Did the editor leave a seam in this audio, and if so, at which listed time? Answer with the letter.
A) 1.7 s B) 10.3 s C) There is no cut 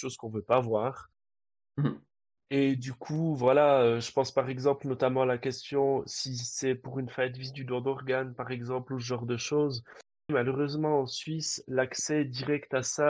B